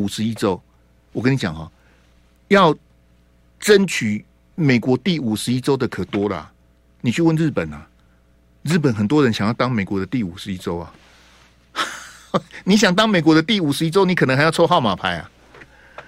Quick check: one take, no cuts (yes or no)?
yes